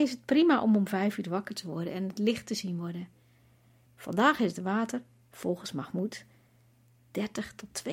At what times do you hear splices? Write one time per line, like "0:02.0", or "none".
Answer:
0:03.9

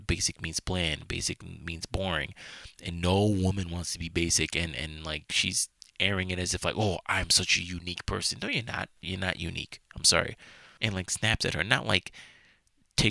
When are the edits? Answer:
0:09.0
0:10.8

